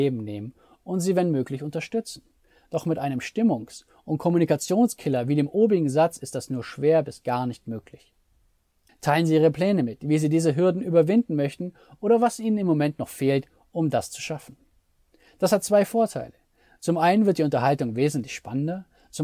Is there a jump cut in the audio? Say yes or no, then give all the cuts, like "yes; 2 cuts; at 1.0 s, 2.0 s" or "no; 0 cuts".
yes; 1 cut; at 8.9 s